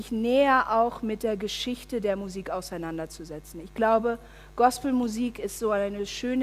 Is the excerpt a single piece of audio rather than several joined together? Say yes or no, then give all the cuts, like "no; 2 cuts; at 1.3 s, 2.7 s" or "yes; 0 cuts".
yes; 0 cuts